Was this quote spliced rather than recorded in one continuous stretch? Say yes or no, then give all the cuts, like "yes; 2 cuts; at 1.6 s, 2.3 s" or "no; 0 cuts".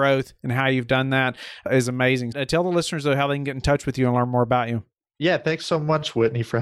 yes; 1 cut; at 2.3 s